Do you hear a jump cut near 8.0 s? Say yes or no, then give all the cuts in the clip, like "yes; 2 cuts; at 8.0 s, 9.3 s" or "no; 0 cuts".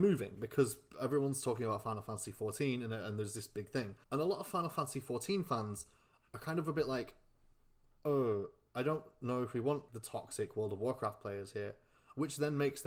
no; 2 cuts; at 4.0 s, 9.9 s